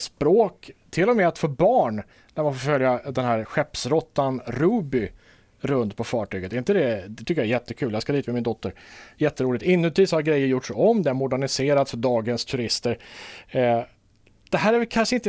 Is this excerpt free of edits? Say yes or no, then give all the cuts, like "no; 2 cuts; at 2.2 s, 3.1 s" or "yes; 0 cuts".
yes; 0 cuts